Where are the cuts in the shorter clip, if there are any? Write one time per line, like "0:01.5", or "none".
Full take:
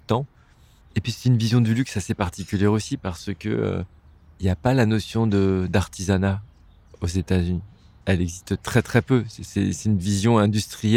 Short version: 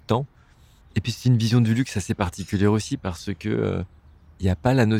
none